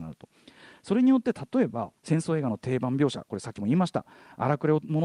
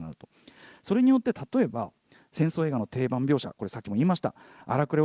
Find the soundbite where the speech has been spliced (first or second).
first